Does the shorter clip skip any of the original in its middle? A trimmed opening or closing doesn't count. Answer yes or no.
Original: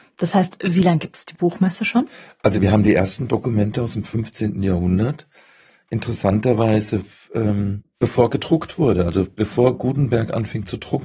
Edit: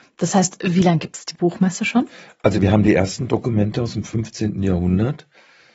no